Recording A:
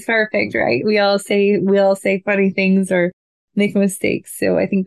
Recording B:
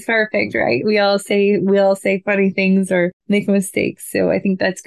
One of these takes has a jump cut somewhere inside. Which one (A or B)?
B